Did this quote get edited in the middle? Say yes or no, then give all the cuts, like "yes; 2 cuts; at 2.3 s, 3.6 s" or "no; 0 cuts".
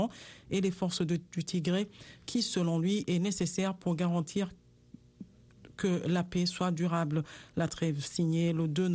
no; 0 cuts